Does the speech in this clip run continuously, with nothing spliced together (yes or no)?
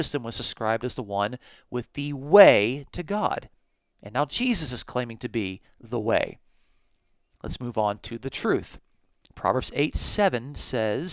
yes